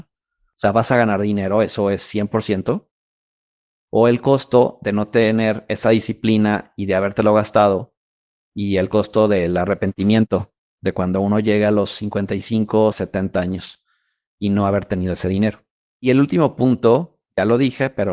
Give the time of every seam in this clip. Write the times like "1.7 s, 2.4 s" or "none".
12.9 s, 15.8 s